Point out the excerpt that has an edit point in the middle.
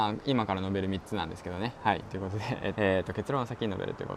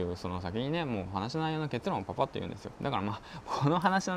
first; 1 cut; at 2.7 s

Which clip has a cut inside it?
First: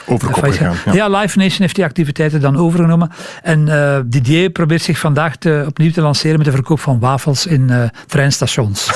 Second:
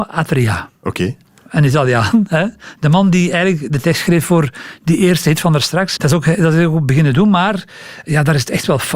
second; 1 cut; at 6.0 s

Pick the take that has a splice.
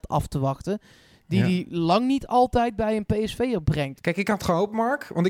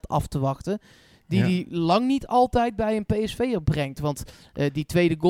first; 1 cut; at 4.0 s

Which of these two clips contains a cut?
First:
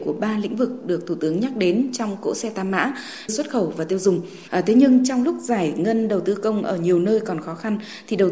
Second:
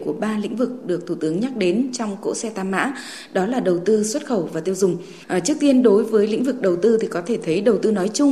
first; 2 cuts; at 3.3 s, 4.5 s

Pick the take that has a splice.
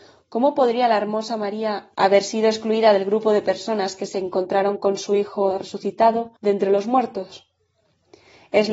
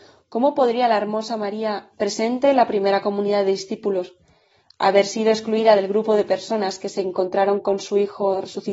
first; 2 cuts; at 1.9 s, 6.4 s

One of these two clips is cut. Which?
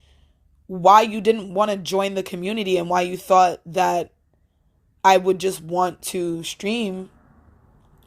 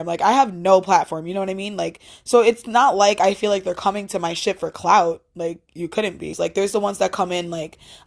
second; 1 cut; at 6.3 s

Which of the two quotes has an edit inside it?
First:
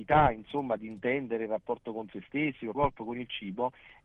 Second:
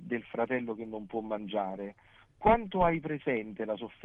first; 1 cut; at 2.7 s

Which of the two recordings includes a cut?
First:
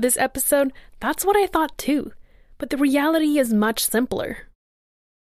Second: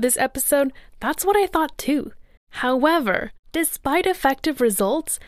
second; 1 cut; at 2.4 s

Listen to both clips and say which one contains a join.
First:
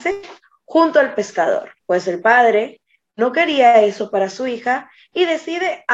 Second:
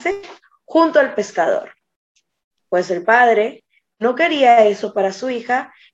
first; 1 cut; at 1.8 s

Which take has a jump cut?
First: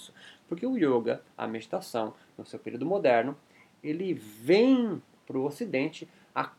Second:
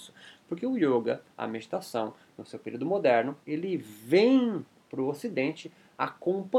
second; 1 cut; at 3.4 s

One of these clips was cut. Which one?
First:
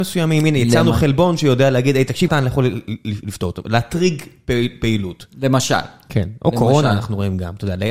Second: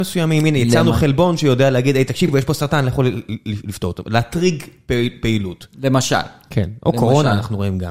first; 1 cut; at 2.3 s

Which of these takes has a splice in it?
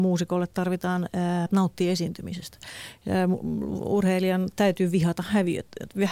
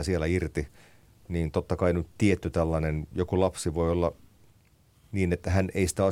first; 1 cut; at 1.5 s

